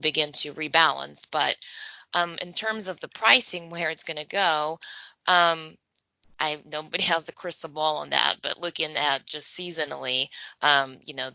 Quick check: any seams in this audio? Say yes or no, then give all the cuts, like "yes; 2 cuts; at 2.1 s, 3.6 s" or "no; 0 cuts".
no; 0 cuts